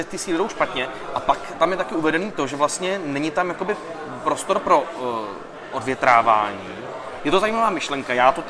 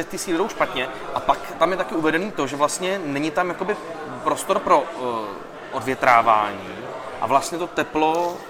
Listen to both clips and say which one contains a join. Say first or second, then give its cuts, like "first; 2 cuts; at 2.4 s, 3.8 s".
first; 1 cut; at 7.2 s